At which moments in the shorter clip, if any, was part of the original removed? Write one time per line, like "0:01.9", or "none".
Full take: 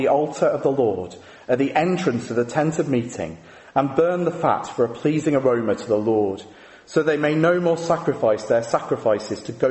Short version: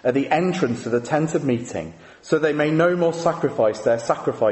0:02.1